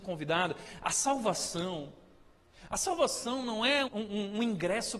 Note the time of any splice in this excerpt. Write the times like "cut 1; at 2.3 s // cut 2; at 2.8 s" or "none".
cut 1; at 3.9 s

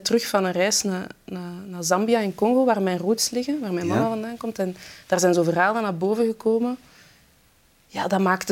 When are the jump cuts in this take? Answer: none

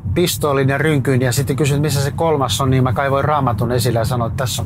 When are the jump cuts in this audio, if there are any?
none

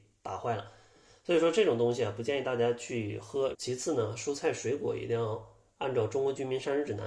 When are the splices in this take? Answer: cut 1; at 3.5 s

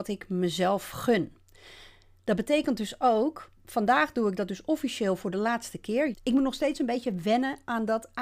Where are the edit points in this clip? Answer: cut 1; at 3.6 s // cut 2; at 6.1 s

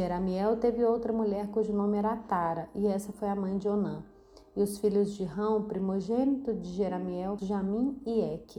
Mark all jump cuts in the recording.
cut 1; at 7.4 s

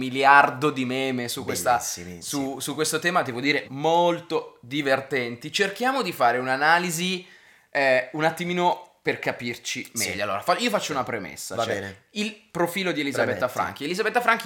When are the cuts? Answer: cut 1; at 3.6 s

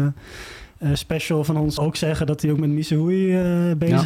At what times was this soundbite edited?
cut 1; at 1.8 s

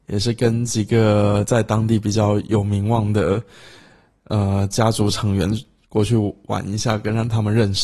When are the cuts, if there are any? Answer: none

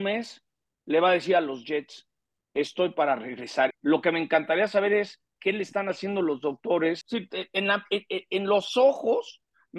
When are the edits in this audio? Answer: cut 1; at 3.7 s // cut 2; at 7.0 s

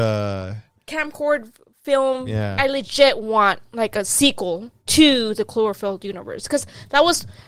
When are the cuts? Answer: cut 1; at 2.6 s // cut 2; at 4.8 s

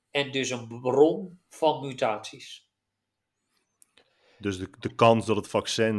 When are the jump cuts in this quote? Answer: none

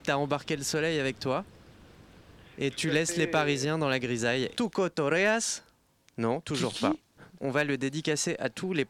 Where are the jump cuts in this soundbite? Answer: cut 1; at 4.5 s // cut 2; at 7.4 s

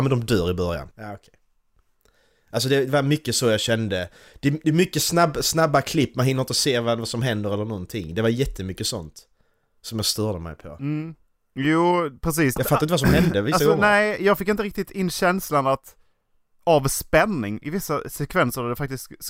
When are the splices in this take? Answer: cut 1; at 0.9 s // cut 2; at 12.6 s

